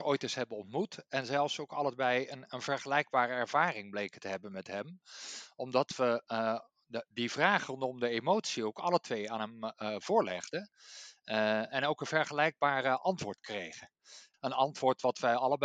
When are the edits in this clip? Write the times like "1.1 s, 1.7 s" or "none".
14.3 s